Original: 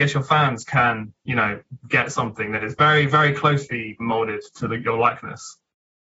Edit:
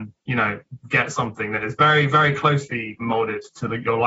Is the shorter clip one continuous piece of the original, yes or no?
yes